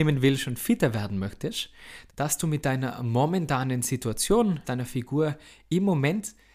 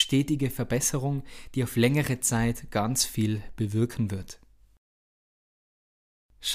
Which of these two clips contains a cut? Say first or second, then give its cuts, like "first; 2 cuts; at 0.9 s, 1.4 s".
first; 2 cuts; at 2.1 s, 4.6 s